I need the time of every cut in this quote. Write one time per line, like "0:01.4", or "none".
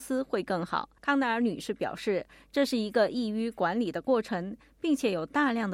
0:01.0